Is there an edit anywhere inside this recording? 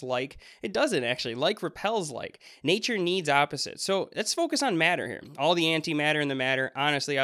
no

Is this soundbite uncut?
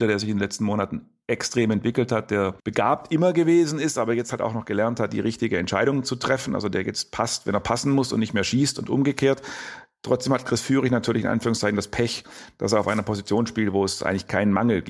no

